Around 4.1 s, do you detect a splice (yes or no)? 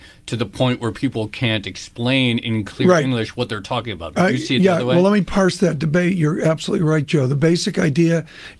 no